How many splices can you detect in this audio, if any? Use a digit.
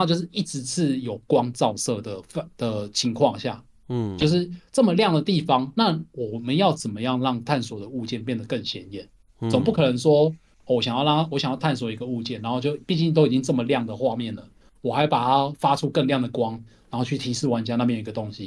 0